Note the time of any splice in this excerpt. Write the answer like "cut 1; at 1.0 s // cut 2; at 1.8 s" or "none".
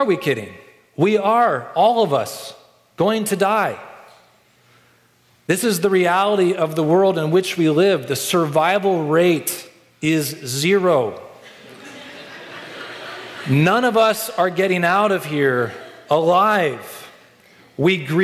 none